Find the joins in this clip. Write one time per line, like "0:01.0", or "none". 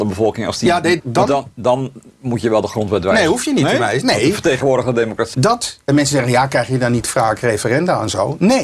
0:01.0
0:05.3